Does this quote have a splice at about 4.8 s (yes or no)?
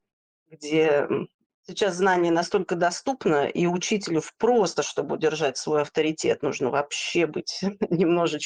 no